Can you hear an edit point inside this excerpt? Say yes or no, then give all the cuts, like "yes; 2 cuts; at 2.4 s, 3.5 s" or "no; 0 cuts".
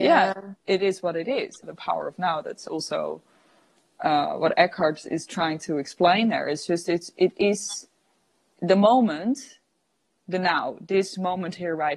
yes; 1 cut; at 1.6 s